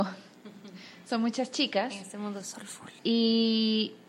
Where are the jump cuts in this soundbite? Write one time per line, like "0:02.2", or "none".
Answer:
0:03.0